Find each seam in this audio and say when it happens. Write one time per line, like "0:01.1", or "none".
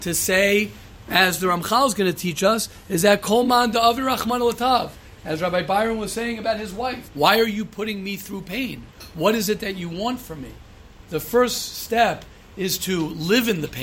0:07.1
0:11.0